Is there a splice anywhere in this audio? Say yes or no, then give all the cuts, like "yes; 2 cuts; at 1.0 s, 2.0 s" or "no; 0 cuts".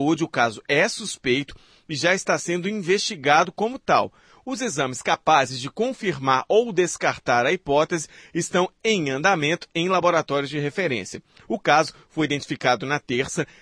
no; 0 cuts